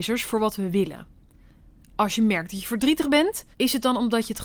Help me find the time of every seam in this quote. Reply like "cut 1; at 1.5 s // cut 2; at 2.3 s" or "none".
cut 1; at 3.5 s